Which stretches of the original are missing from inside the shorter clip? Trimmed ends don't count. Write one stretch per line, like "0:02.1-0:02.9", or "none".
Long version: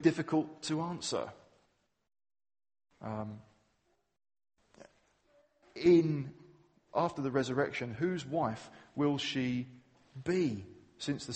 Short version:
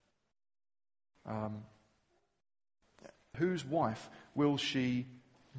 0:05.1-0:08.0